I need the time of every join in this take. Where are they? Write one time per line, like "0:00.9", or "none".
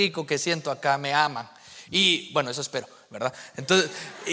none